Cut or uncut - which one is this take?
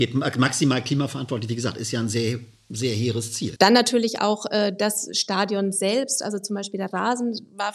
cut